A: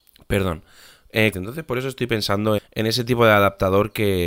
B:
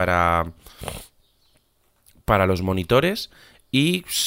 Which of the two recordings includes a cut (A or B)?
A